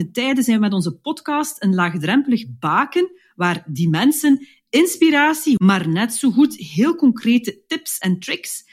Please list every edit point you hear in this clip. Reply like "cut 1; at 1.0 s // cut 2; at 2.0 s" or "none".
cut 1; at 5.6 s